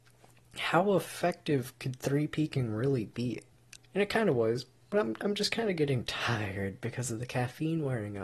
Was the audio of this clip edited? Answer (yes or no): yes